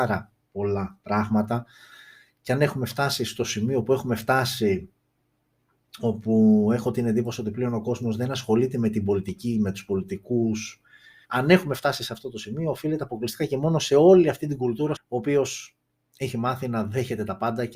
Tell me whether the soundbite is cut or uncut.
cut